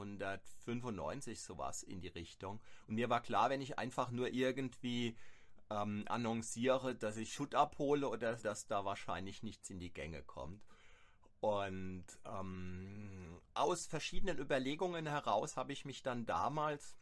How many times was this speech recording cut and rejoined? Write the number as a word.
one